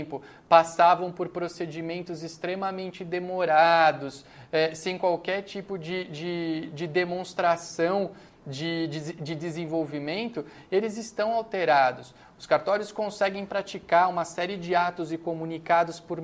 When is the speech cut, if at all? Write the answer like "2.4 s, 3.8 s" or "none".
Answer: none